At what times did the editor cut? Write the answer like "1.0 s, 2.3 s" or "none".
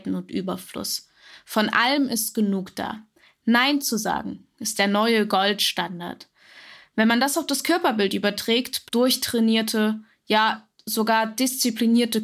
8.9 s